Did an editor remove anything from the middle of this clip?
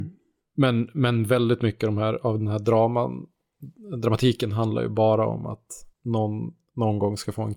yes; 1 cut; at 5.9 s

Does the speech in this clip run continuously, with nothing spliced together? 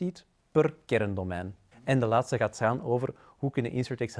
no; 1 cut; at 1.7 s

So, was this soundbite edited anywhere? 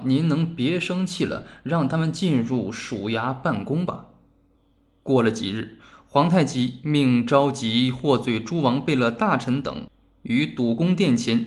no; 0 cuts

